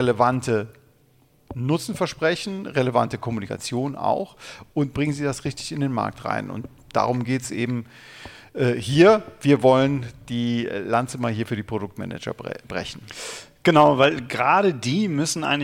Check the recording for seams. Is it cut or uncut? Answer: uncut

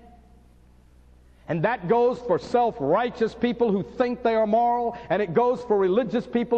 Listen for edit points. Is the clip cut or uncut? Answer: uncut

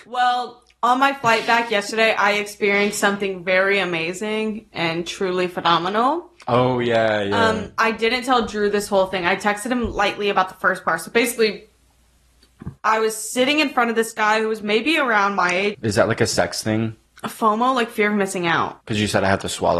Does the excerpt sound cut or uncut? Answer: cut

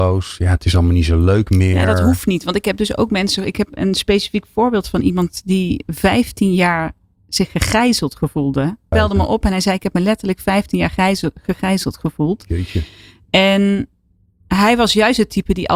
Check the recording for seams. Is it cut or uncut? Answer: cut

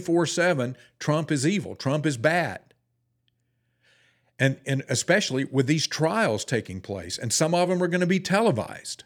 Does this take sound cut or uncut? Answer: uncut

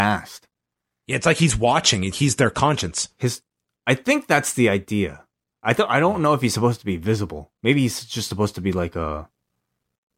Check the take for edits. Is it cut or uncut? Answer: cut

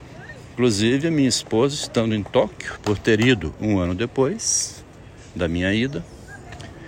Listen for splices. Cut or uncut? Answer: cut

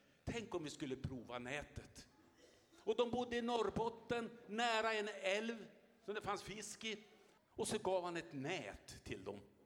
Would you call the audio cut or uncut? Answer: cut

